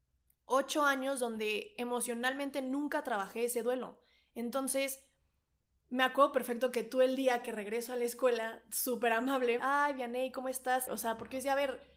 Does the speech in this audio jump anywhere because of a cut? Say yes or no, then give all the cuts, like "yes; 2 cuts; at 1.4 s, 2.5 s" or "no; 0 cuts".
yes; 2 cuts; at 9.6 s, 10.9 s